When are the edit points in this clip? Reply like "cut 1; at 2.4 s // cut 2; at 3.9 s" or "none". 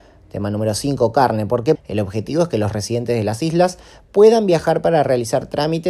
cut 1; at 1.8 s